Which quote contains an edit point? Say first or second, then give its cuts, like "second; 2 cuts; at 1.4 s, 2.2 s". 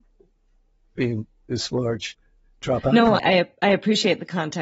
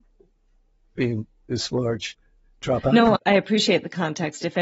second; 1 cut; at 3.2 s